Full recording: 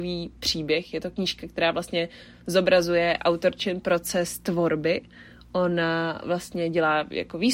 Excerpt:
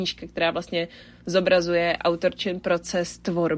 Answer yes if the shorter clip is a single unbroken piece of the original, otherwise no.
yes